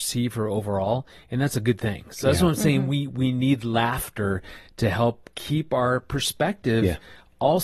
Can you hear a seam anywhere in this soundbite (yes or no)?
no